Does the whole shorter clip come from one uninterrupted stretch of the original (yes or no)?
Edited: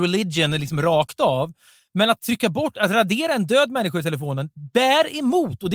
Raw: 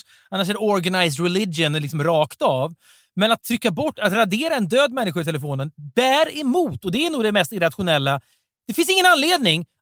yes